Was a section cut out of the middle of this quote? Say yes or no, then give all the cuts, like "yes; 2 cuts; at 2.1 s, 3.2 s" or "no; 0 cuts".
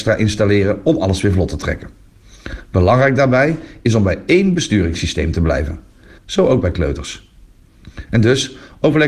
yes; 1 cut; at 6.2 s